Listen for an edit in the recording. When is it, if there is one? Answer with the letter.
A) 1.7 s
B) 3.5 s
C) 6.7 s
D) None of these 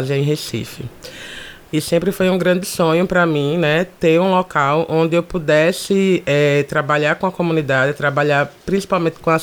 A